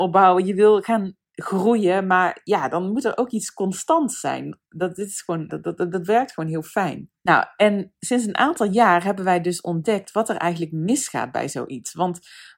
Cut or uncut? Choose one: cut